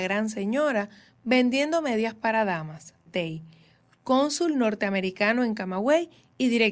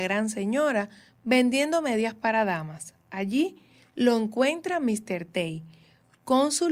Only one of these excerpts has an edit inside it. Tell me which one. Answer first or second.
first